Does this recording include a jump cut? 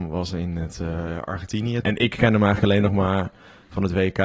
yes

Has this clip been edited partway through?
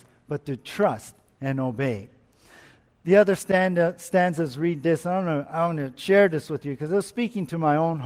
no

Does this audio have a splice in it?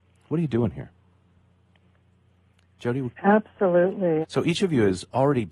yes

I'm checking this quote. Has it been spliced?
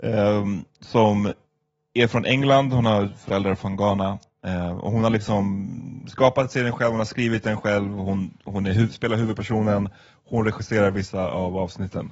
no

